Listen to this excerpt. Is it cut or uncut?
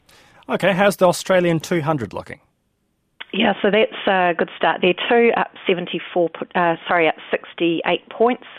uncut